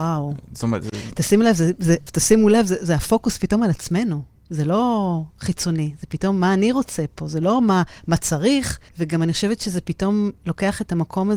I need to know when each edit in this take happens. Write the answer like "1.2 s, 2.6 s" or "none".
2.1 s, 8.9 s